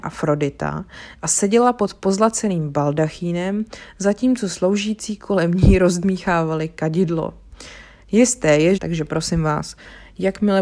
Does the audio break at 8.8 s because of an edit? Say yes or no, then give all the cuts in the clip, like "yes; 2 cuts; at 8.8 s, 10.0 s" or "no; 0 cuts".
yes; 1 cut; at 8.8 s